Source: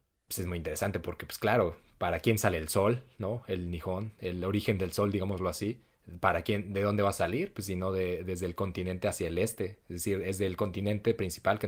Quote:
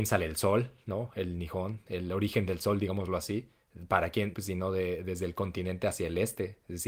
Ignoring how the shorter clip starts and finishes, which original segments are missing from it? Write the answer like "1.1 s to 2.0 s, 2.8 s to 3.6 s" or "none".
6.6 s to 7.5 s